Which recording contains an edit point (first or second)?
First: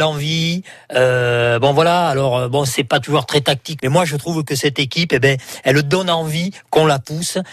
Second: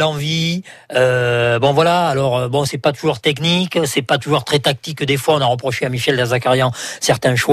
first